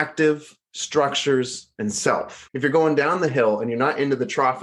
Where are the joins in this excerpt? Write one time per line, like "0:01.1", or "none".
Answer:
0:02.5